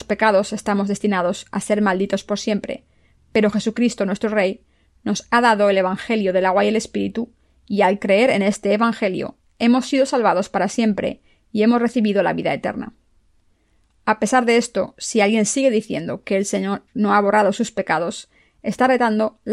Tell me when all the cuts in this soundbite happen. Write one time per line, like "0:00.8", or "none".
none